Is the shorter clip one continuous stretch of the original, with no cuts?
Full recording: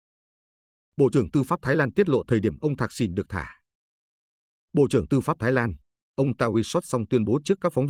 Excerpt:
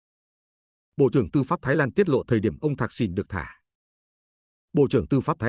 yes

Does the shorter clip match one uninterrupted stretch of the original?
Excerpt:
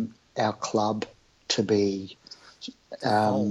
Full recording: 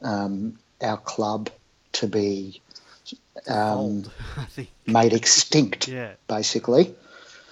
yes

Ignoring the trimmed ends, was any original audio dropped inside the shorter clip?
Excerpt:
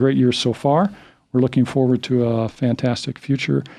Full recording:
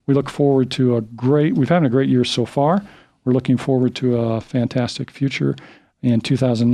no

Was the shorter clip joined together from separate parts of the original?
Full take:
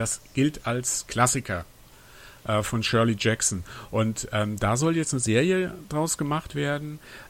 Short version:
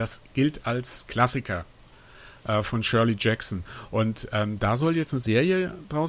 no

